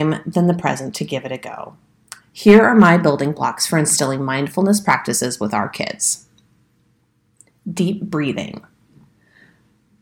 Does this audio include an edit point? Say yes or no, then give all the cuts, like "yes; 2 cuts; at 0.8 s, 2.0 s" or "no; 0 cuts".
no; 0 cuts